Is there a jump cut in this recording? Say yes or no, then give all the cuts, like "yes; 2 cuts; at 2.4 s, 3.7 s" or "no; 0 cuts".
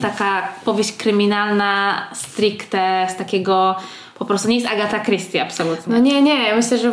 no; 0 cuts